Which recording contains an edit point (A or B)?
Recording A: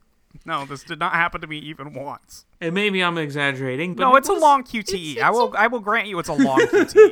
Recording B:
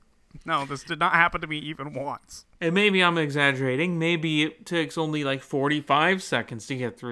A